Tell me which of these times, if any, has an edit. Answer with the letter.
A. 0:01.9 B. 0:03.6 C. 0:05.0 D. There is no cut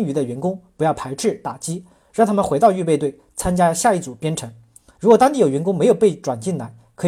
C